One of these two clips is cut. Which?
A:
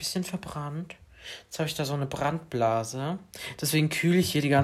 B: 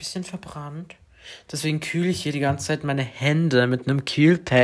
B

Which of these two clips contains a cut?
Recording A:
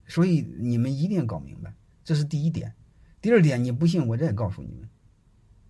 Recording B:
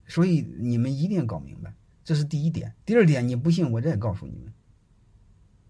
B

